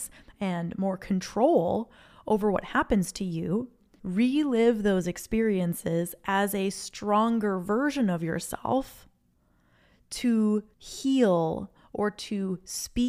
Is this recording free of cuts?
no; 2 cuts; at 4.0 s, 10.7 s

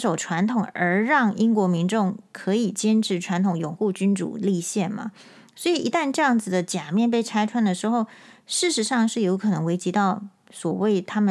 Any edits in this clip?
no; 0 cuts

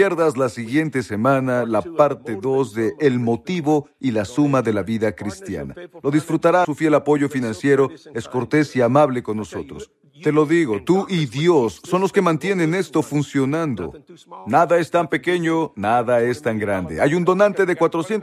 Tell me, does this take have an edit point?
yes; 1 cut; at 6.6 s

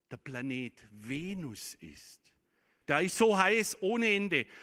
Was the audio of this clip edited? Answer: yes; 1 cut; at 2.8 s

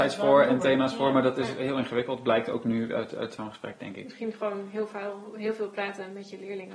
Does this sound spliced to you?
no; 0 cuts

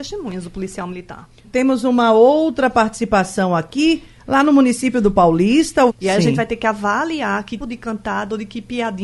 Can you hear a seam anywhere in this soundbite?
yes; 3 cuts; at 1.4 s, 5.9 s, 7.6 s

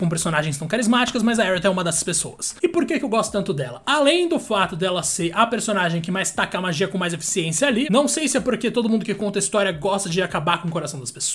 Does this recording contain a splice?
yes; 1 cut; at 7.9 s

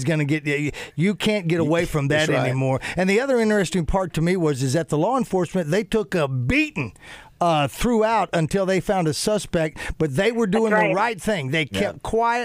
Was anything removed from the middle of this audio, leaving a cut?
no; 0 cuts

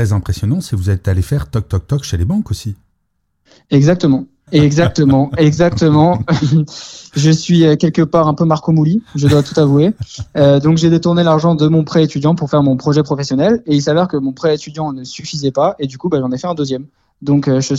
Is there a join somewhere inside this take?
yes; 1 cut; at 4.5 s

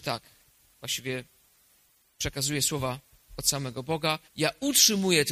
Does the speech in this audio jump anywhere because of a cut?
yes; 1 cut; at 4.3 s

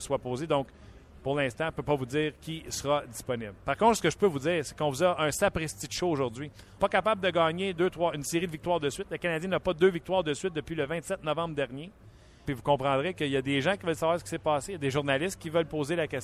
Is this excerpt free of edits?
no; 2 cuts; at 6.8 s, 12.4 s

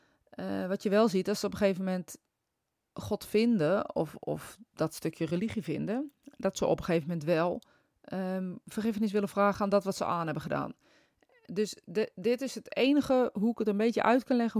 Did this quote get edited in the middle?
no; 0 cuts

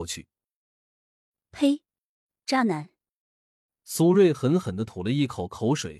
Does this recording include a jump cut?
no; 0 cuts

